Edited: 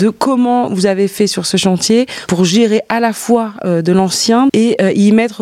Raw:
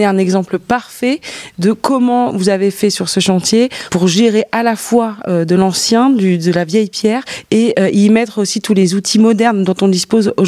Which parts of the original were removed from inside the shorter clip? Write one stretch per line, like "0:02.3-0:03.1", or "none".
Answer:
0:06.1-0:07.5